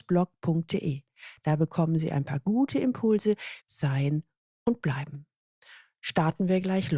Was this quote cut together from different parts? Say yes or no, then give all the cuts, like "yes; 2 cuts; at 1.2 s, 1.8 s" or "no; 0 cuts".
yes; 1 cut; at 3.6 s